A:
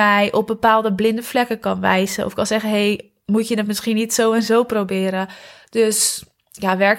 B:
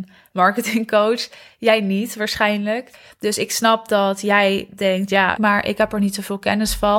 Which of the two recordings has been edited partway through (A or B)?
B